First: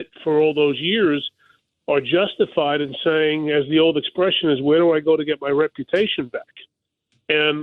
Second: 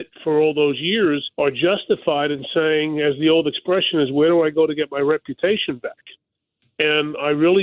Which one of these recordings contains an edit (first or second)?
second